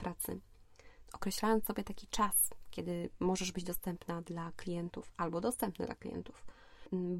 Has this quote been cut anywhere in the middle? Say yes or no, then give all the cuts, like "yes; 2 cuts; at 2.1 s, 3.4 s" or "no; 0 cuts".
yes; 1 cut; at 1.1 s